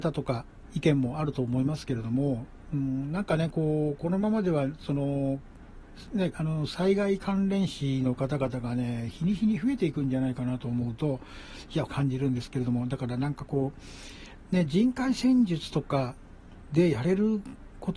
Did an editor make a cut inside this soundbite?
yes; 2 cuts; at 6.3 s, 11.9 s

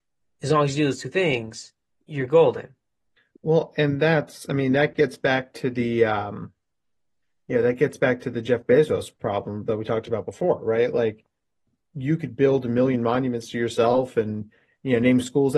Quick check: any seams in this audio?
no; 0 cuts

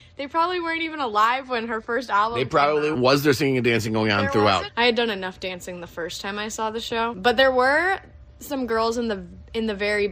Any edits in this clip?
yes; 2 cuts; at 2.9 s, 4.7 s

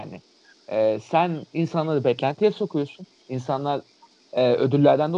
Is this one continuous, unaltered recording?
yes; 0 cuts

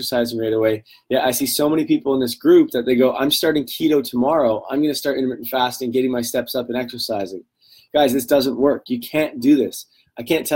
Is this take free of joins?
yes; 0 cuts

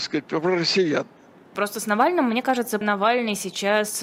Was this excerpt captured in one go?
no; 2 cuts; at 1.6 s, 2.8 s

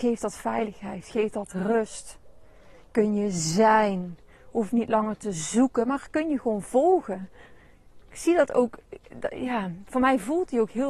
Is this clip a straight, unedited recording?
yes; 0 cuts

